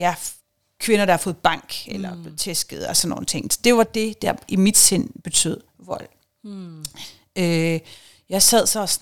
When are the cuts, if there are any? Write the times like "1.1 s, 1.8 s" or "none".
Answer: none